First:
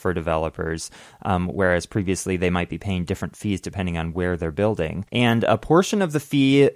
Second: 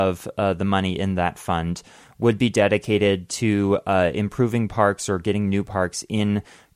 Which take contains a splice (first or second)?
first